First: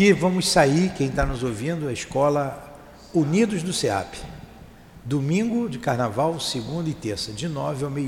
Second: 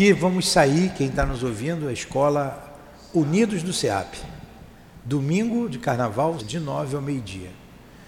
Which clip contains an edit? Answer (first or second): second